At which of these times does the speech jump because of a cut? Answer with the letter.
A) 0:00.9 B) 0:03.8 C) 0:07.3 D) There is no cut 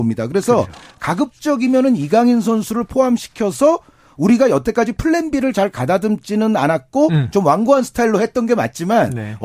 D